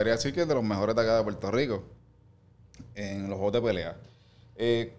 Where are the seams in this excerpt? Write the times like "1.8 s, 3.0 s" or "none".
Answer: none